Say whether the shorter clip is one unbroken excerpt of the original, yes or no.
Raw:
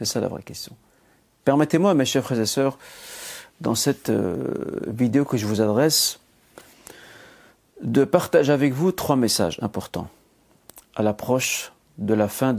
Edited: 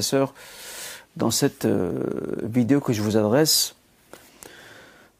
yes